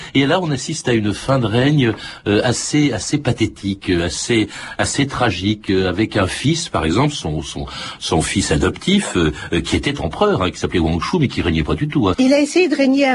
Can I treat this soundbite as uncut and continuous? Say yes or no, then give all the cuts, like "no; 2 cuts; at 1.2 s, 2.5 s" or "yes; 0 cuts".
no; 1 cut; at 12.1 s